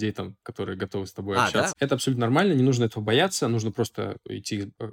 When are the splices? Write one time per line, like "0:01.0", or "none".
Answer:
0:01.7

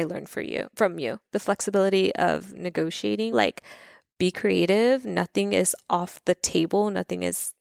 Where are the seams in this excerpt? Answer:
0:03.3

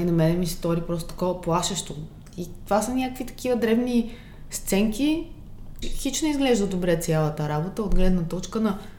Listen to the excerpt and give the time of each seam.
0:05.8

